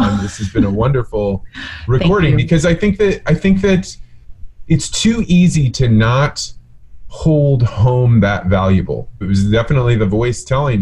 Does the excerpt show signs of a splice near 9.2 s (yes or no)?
yes